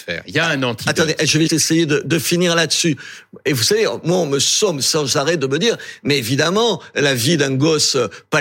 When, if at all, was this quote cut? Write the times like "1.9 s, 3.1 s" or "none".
1.5 s